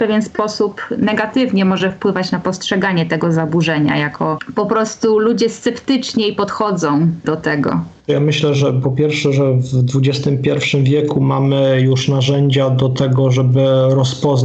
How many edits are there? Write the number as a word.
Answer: one